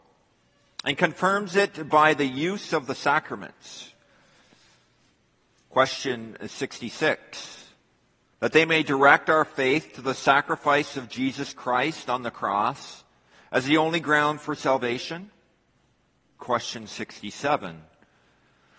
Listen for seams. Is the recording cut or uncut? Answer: cut